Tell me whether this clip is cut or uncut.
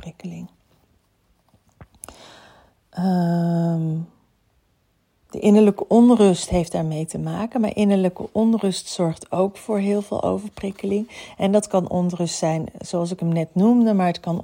uncut